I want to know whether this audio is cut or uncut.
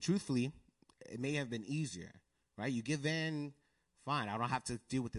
uncut